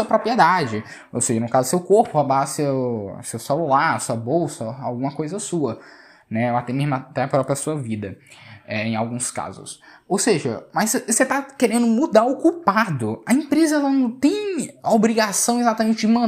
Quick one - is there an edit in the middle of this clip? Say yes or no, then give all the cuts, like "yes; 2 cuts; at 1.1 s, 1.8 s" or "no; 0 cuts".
no; 0 cuts